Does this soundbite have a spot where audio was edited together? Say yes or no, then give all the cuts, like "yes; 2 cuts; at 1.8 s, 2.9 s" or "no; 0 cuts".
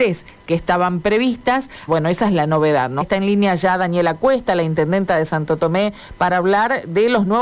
yes; 2 cuts; at 1.9 s, 3.0 s